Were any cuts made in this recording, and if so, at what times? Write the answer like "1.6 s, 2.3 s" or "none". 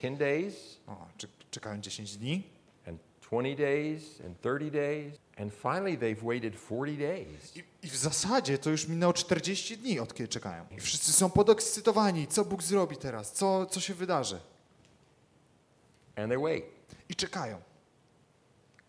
5.2 s, 10.7 s

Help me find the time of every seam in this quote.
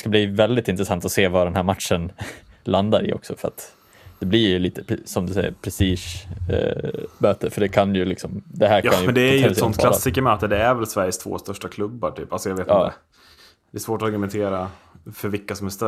none

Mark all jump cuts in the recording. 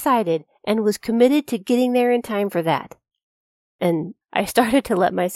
4.2 s

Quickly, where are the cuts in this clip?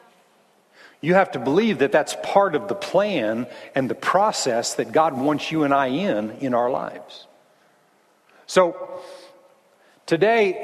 none

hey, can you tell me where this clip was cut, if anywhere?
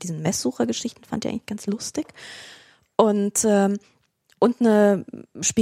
none

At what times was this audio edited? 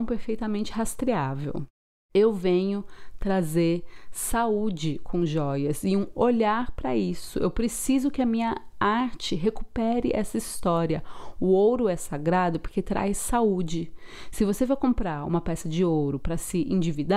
none

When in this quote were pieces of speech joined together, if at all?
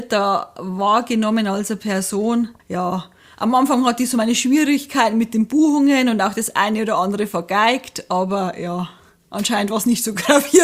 2.6 s

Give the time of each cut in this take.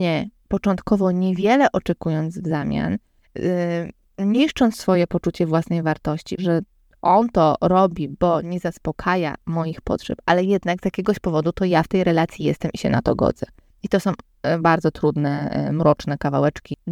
6.4 s

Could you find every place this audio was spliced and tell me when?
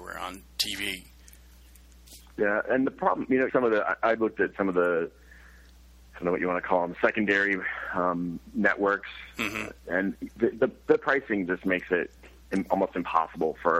3.5 s

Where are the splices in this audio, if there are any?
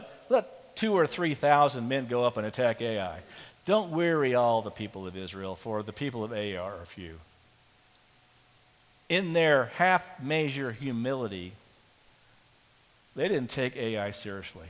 none

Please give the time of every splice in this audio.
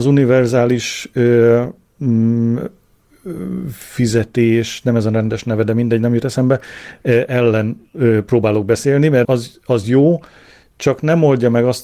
9.2 s

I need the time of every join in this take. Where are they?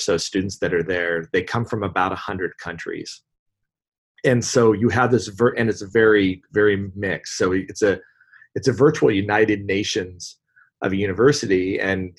none

